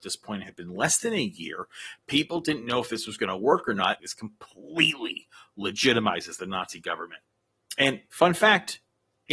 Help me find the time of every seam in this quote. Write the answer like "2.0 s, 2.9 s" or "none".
4.0 s